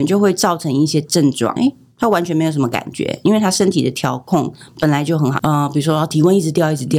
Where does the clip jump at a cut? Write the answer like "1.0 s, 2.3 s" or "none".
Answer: 1.6 s, 5.4 s